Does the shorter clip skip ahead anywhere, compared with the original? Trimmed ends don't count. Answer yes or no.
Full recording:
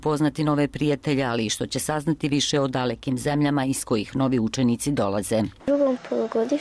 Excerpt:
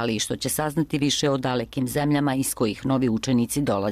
no